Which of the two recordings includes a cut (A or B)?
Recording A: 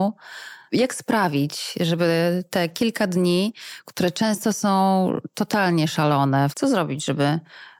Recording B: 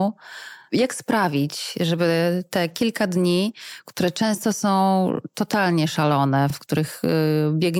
A